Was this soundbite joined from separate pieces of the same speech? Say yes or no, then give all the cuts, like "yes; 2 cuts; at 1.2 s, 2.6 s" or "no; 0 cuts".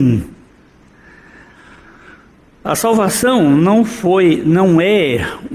no; 0 cuts